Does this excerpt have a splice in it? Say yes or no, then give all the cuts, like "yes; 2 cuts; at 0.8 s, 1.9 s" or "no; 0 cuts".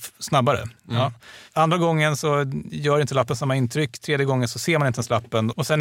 yes; 1 cut; at 1.5 s